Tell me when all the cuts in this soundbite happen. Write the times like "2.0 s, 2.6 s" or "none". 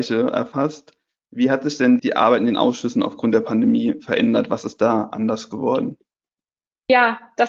2.0 s